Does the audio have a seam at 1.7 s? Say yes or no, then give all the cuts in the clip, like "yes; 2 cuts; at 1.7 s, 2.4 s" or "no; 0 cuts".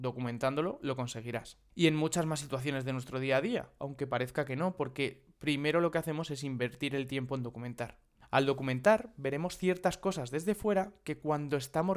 no; 2 cuts; at 3.8 s, 8.2 s